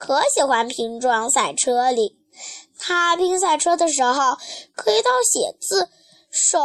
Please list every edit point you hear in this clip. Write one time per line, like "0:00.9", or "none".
0:04.6